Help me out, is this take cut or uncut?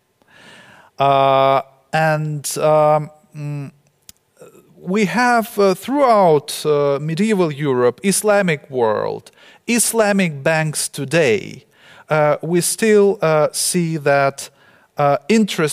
uncut